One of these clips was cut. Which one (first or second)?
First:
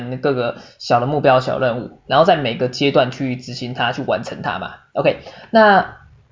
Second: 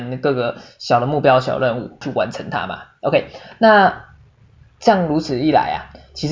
second